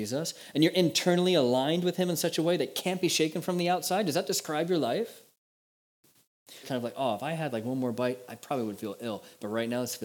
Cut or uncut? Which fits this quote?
cut